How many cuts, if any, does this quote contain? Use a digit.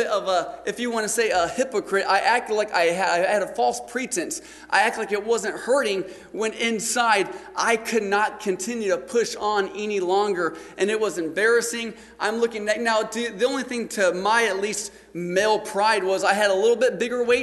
0